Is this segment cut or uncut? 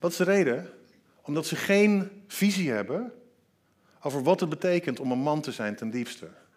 uncut